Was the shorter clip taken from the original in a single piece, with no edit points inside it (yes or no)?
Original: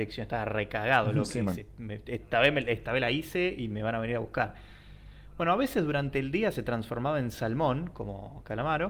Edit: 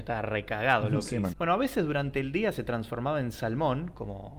no